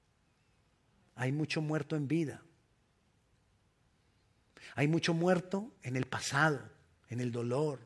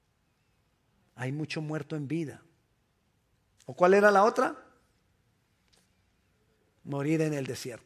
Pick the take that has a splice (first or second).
second